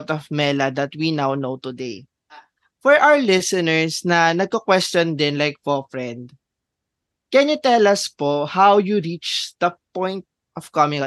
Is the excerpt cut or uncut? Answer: uncut